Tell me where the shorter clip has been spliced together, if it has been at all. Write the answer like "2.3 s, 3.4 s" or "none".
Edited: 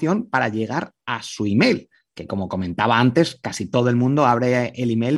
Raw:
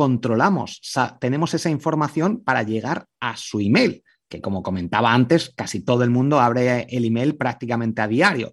none